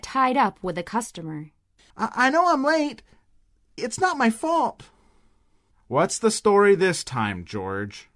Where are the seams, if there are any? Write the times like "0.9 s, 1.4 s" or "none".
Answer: 1.9 s, 3.8 s, 5.7 s